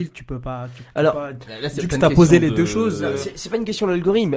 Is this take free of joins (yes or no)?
yes